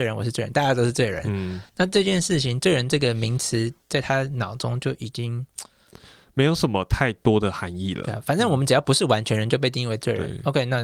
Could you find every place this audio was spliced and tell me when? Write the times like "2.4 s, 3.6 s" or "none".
none